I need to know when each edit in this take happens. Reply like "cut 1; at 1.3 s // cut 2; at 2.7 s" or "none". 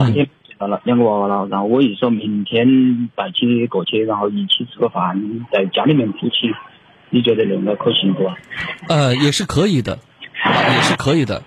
none